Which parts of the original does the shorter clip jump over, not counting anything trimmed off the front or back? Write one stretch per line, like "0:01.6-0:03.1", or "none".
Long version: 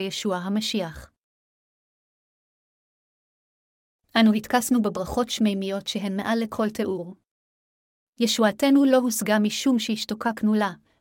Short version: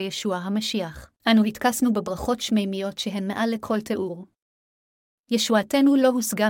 0:01.2-0:04.1